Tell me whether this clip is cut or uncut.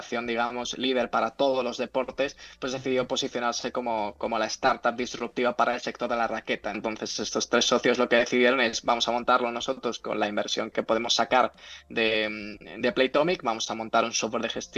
cut